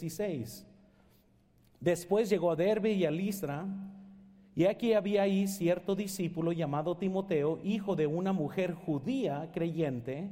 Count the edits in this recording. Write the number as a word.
zero